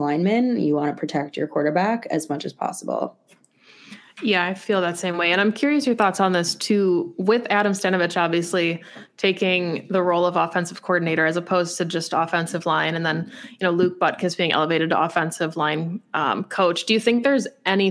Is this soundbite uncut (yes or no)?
yes